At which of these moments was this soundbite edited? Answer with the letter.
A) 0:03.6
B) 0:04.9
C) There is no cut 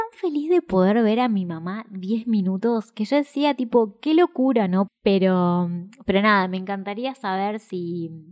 B